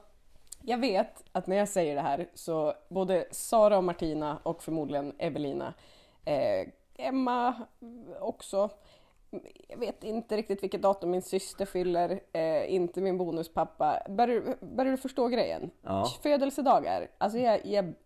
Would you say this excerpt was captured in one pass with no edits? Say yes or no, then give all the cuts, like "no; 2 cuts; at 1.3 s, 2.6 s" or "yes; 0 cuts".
yes; 0 cuts